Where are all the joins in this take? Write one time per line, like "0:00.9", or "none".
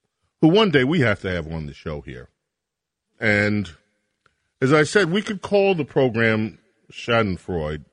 0:03.1